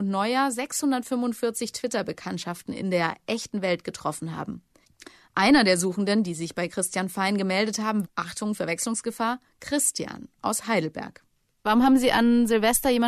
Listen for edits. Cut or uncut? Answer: cut